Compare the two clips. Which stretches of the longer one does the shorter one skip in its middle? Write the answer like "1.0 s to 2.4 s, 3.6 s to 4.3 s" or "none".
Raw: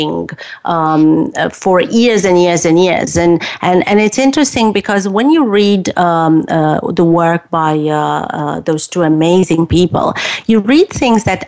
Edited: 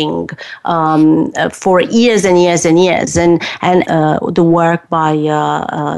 3.8 s to 6.5 s